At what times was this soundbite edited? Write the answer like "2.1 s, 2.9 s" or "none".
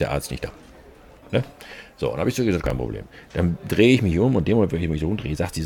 1.2 s, 2.6 s